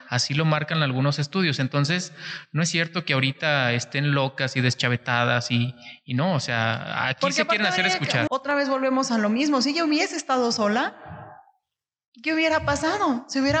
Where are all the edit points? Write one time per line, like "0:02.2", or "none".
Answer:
0:08.3